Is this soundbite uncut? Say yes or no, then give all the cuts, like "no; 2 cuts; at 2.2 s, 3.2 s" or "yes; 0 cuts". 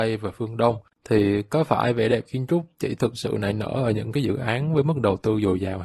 no; 1 cut; at 0.9 s